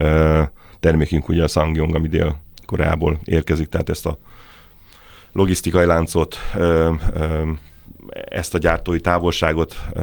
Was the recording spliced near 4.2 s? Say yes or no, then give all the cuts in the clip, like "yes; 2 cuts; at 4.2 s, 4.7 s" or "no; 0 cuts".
no; 0 cuts